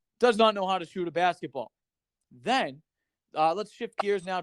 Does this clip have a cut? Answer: yes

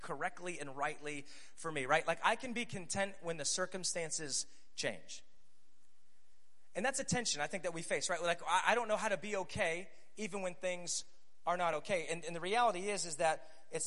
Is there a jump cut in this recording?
no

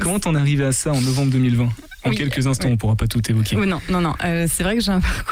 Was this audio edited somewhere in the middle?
no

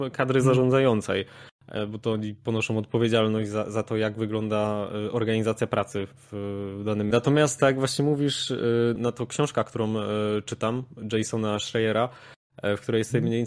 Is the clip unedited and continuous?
no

